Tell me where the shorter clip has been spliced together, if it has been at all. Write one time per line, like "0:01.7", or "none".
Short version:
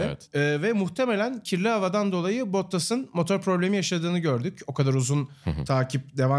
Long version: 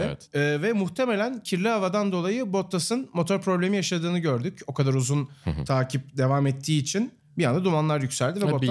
none